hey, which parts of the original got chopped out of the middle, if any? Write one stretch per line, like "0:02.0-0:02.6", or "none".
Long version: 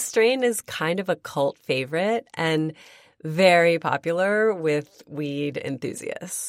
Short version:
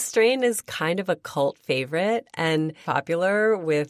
0:02.8-0:03.8